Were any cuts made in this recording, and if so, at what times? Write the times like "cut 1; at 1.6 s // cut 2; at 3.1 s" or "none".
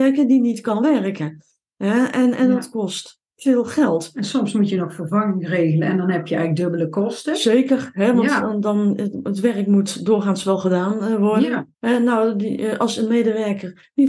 cut 1; at 11.7 s